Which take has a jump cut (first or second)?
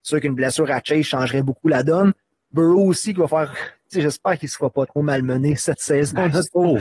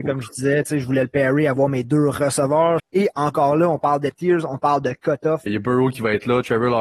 second